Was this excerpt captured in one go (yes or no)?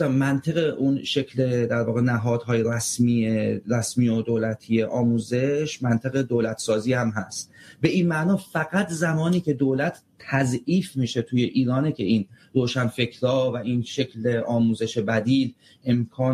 yes